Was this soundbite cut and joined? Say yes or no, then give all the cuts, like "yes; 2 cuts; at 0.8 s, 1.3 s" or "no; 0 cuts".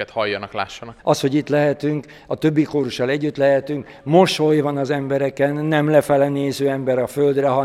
yes; 1 cut; at 1.0 s